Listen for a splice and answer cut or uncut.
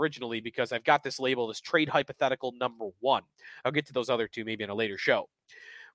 uncut